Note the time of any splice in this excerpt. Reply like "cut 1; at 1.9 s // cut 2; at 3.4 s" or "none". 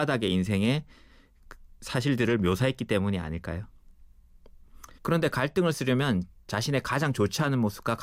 cut 1; at 5.0 s